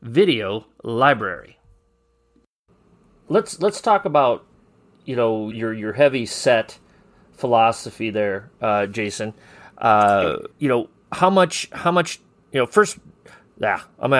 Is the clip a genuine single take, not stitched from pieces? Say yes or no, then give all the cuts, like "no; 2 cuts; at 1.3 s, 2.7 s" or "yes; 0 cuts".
no; 2 cuts; at 5.5 s, 10.5 s